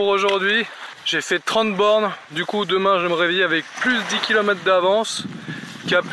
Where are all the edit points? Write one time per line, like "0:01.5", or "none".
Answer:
0:00.9